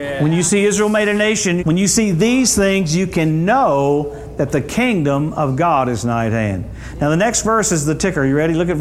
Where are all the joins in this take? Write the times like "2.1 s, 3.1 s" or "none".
1.6 s